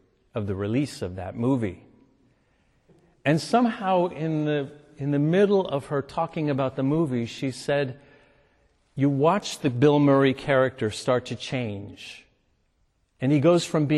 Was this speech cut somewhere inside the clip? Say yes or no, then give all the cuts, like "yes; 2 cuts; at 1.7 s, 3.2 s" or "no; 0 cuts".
no; 0 cuts